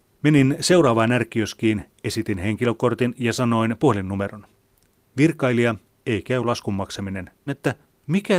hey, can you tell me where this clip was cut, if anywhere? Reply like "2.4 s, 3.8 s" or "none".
7.5 s